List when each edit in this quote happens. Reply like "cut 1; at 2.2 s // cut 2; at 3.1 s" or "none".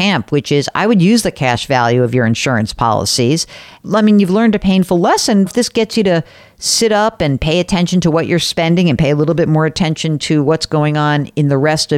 cut 1; at 5.5 s